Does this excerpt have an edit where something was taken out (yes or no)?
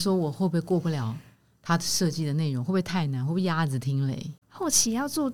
yes